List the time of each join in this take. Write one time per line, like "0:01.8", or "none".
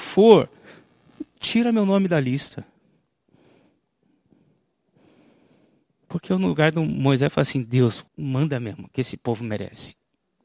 0:08.1